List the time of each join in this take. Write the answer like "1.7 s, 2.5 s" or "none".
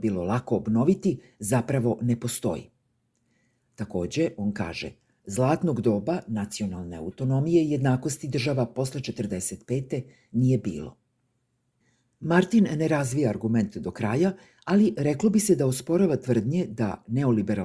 none